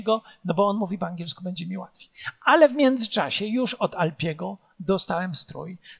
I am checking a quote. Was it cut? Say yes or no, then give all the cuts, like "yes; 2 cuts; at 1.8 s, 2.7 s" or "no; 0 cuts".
no; 0 cuts